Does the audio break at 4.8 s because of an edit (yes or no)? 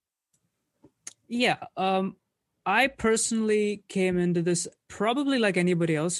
yes